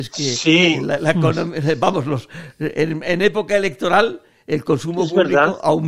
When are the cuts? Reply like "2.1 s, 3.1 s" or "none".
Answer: none